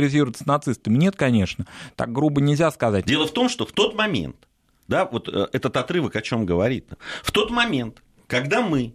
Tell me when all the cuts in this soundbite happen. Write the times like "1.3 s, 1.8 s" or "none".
3.0 s